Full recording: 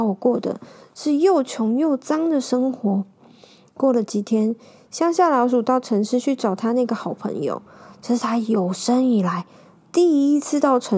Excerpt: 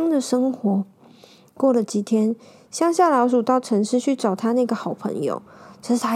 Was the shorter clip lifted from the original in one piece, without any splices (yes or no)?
yes